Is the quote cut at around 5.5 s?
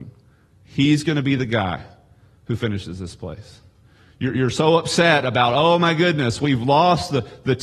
no; 0 cuts

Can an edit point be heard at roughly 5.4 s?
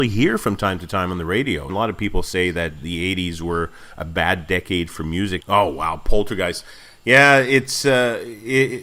yes; 2 cuts; at 1.7 s, 5.4 s

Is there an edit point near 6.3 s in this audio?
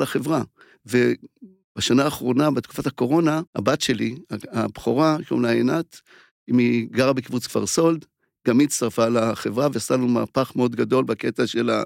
no; 1 cut; at 3.5 s

